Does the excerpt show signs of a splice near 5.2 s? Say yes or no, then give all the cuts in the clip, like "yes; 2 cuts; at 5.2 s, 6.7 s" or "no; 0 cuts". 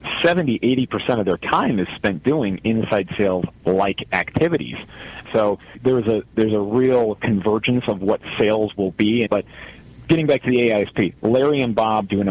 yes; 2 cuts; at 5.2 s, 9.3 s